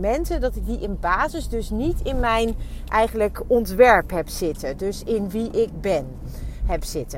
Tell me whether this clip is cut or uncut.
uncut